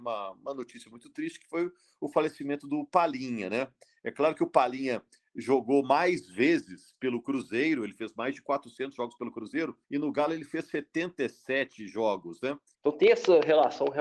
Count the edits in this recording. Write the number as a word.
two